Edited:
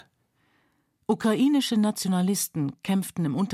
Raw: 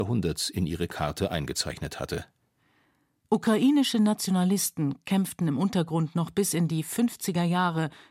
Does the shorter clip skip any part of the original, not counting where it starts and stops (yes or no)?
no